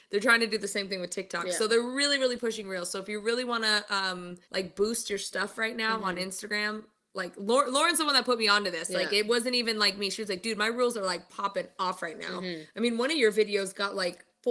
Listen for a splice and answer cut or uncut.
cut